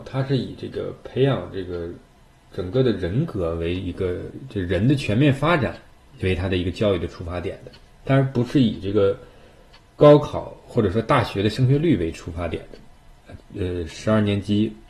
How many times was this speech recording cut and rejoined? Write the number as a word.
one